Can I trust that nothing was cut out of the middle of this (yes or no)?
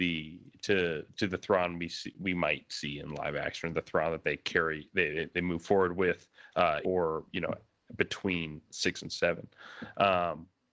no